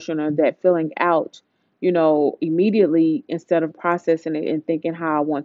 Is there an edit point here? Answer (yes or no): yes